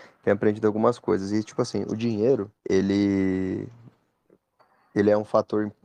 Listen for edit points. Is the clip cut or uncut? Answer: cut